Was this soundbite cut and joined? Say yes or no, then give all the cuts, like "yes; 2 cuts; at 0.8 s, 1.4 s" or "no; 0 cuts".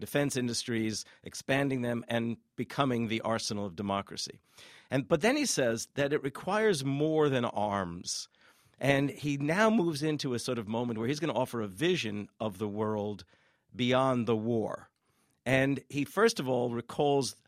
no; 0 cuts